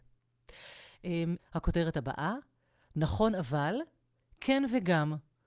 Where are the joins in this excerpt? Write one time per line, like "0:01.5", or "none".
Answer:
0:01.4